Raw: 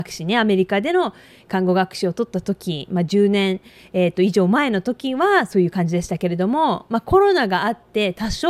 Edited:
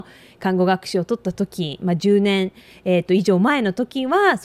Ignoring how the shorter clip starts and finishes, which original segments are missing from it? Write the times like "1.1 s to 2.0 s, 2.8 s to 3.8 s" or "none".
none

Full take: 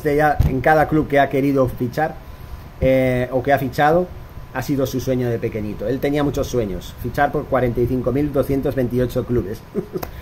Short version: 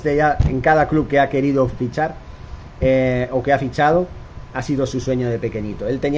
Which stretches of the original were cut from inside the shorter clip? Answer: none

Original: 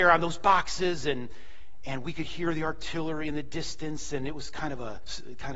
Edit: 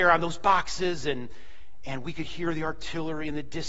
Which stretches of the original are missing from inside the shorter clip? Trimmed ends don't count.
none

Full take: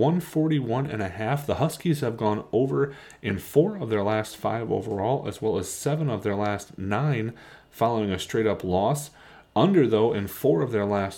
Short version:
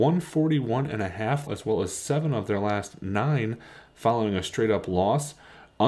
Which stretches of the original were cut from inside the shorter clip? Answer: 1.5 s to 5.2 s

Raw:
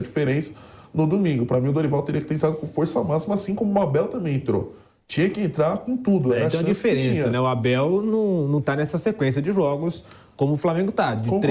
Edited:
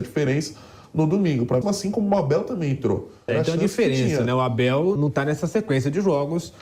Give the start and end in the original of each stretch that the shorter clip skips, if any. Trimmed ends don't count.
1.6 s to 3.3 s, 4.9 s to 6.3 s, 8.0 s to 8.5 s

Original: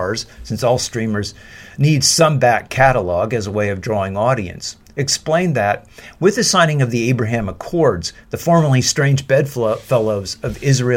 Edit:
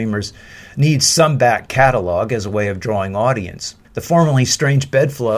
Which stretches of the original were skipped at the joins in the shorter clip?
4.9 s to 8.2 s

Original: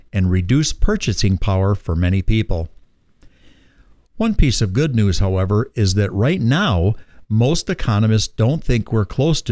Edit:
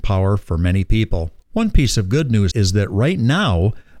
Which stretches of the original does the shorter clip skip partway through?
2.8 s to 4.0 s, 5.1 s to 5.7 s

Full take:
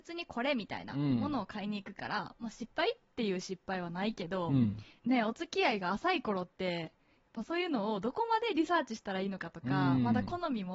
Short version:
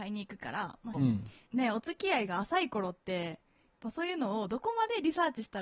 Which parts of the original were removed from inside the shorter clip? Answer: 2.5 s to 4.5 s

